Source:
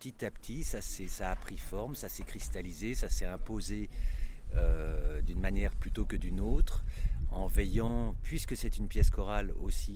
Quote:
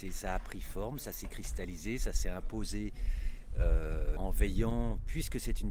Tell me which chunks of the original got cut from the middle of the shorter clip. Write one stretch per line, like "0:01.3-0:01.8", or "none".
0:05.1-0:07.3